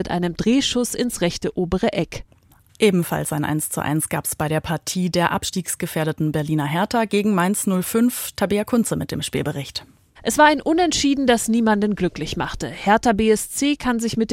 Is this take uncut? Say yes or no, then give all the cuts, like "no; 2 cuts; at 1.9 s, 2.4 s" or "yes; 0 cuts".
no; 1 cut; at 2.7 s